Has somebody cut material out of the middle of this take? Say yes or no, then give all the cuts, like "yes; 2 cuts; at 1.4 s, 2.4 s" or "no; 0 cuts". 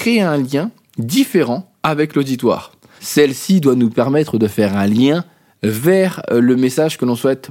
yes; 1 cut; at 3.0 s